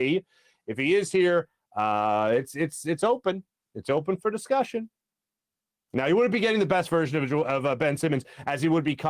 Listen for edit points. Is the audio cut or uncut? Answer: uncut